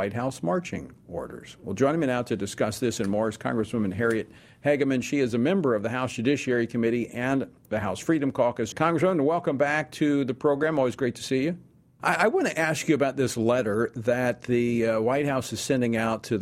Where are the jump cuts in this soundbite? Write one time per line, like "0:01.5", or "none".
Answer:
0:08.7
0:12.0